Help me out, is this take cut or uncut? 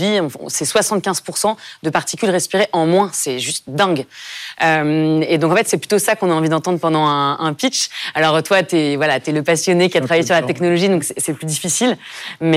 uncut